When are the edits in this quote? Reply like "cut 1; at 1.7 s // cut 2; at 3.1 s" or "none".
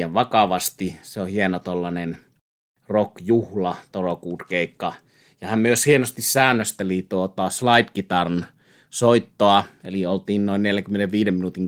none